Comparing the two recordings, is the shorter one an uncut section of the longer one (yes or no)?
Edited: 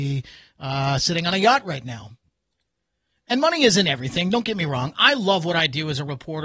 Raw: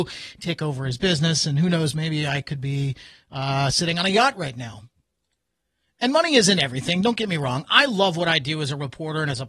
yes